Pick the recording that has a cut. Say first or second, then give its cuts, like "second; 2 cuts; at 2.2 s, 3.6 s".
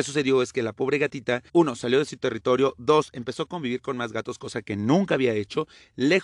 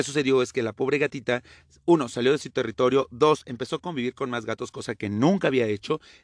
first; 1 cut; at 1.5 s